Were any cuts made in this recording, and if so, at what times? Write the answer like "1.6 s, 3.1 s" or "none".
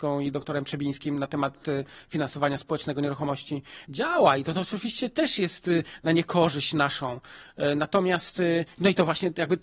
3.8 s

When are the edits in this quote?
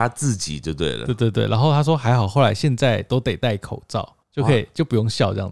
4.2 s

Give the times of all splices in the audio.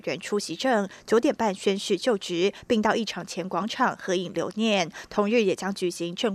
none

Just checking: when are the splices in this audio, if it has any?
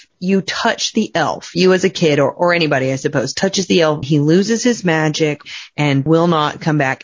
4.0 s

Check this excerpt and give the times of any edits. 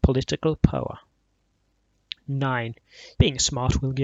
3.1 s

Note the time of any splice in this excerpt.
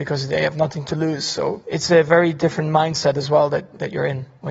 none

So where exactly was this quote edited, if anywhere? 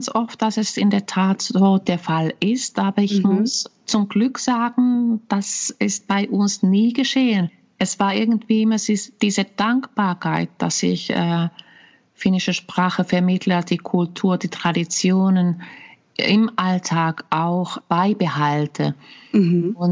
none

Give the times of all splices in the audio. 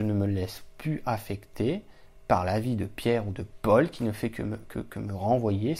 4.7 s

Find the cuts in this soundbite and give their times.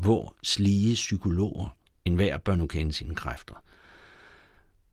2.0 s

